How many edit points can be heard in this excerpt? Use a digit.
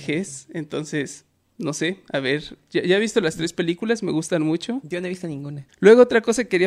1